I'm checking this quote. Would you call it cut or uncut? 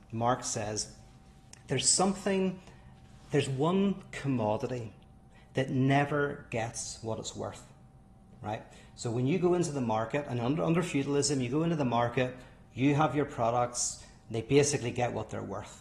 uncut